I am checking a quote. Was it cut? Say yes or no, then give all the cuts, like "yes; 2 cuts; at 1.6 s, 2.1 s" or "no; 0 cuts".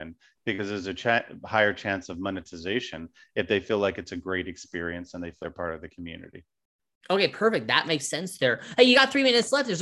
yes; 1 cut; at 5.4 s